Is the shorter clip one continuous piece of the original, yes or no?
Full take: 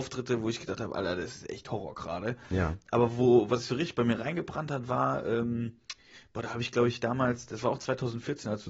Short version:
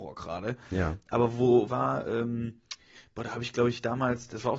no